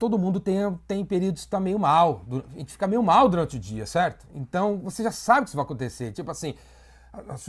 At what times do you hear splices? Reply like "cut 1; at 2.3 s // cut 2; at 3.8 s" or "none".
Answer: none